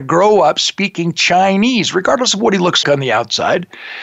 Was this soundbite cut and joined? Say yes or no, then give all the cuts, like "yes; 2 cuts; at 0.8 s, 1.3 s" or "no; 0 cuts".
yes; 1 cut; at 2.8 s